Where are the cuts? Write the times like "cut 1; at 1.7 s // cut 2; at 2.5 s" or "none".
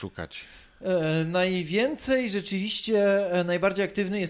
none

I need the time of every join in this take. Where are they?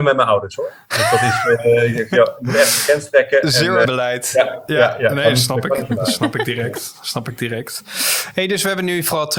cut 1; at 3.8 s

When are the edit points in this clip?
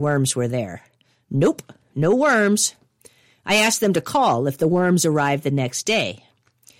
none

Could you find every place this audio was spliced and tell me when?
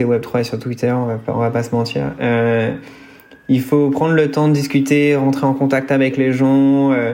none

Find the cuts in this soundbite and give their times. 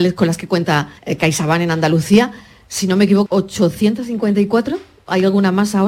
cut 1; at 1.0 s // cut 2; at 3.3 s

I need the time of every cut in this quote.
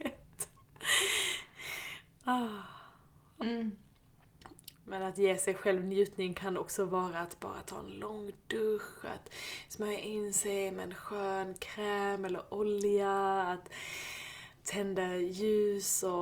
cut 1; at 3.4 s // cut 2; at 4.7 s // cut 3; at 14.6 s

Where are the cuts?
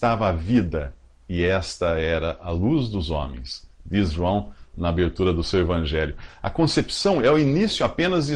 cut 1; at 6.3 s

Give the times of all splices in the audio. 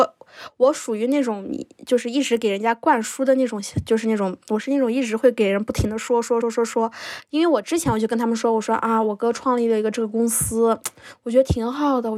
cut 1; at 6.4 s

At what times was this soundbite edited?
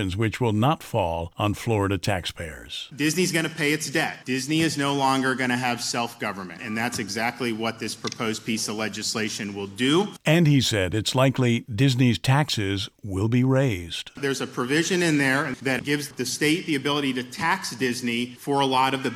cut 1; at 6.6 s

